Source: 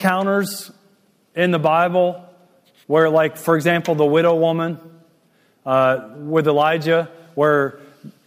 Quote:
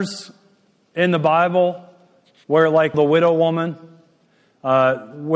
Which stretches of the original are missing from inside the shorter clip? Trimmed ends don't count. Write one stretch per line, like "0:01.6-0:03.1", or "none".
0:03.3-0:04.0